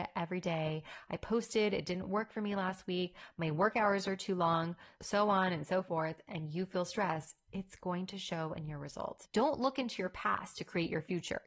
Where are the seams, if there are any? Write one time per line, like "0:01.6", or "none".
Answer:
0:09.2